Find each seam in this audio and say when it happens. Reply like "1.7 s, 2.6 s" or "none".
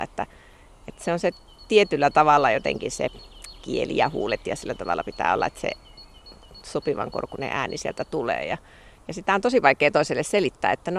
none